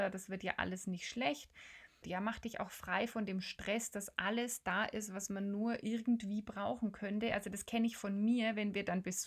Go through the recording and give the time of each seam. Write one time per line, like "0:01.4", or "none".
0:02.0